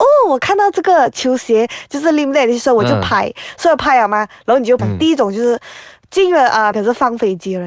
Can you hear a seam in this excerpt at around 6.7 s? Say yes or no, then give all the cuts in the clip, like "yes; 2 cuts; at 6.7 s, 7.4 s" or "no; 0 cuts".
yes; 2 cuts; at 4.8 s, 6.7 s